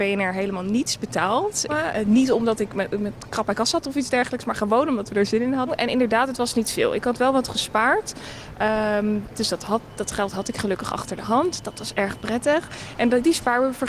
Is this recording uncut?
no; 1 cut; at 1.7 s

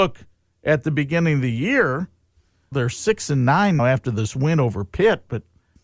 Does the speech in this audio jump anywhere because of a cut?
yes; 2 cuts; at 2.7 s, 3.8 s

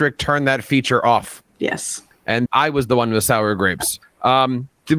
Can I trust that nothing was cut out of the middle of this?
no; 2 cuts; at 2.5 s, 4.0 s

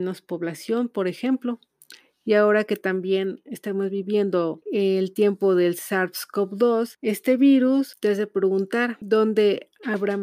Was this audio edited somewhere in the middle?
no; 0 cuts

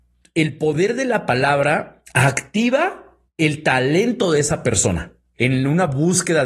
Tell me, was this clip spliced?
yes; 1 cut; at 5.4 s

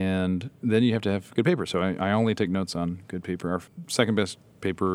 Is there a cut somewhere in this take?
no; 0 cuts

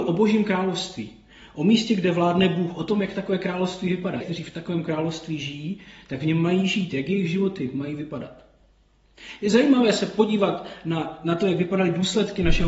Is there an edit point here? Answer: yes; 1 cut; at 4.2 s

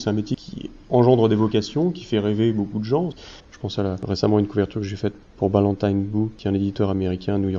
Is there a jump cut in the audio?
yes; 1 cut; at 3.4 s

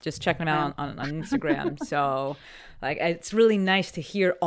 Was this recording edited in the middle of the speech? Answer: no; 0 cuts

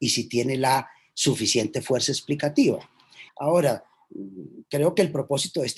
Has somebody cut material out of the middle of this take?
yes; 1 cut; at 3.3 s

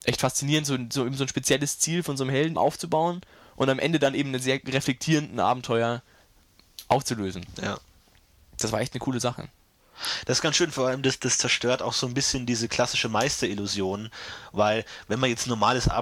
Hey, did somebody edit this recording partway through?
yes; 1 cut; at 2.5 s

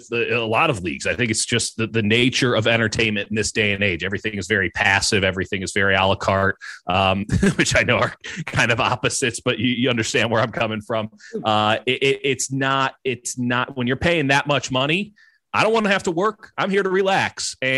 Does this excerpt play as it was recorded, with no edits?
yes; 0 cuts

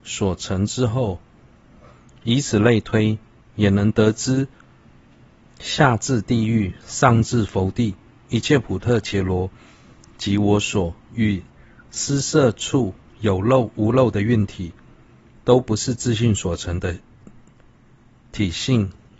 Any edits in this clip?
yes; 1 cut; at 11.0 s

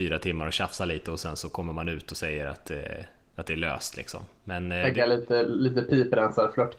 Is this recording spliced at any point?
no; 0 cuts

